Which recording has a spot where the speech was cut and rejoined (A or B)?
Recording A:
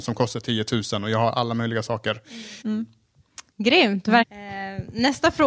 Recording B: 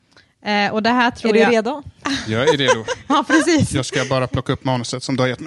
A